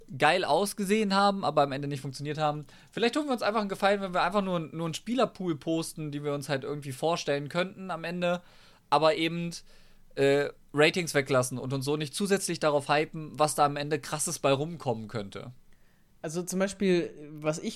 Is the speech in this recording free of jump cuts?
yes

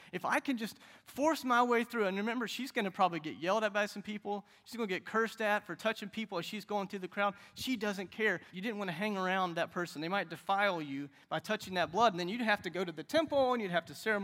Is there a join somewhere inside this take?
yes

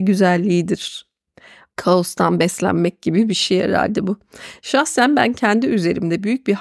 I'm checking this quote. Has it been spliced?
yes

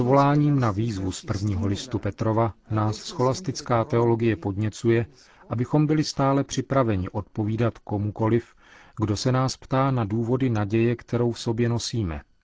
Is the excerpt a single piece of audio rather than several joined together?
yes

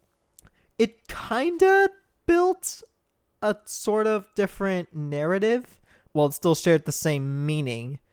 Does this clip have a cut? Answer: yes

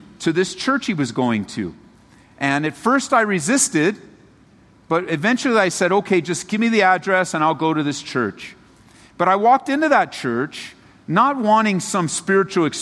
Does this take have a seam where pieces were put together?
no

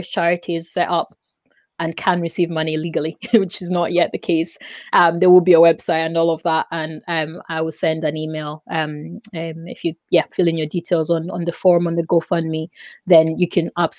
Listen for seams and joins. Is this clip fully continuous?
yes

